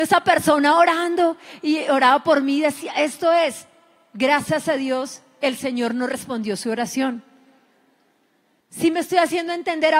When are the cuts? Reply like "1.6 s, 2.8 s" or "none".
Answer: none